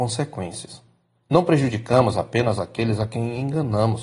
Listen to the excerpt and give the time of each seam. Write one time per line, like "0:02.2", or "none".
none